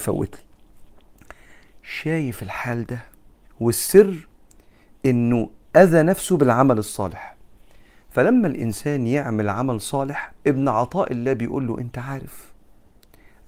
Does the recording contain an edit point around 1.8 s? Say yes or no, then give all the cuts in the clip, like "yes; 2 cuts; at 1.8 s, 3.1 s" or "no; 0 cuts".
no; 2 cuts; at 3.4 s, 10.4 s